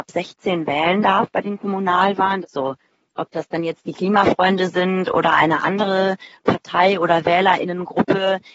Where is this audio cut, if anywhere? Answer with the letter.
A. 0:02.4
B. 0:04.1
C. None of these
A